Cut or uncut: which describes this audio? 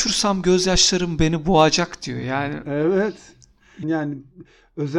cut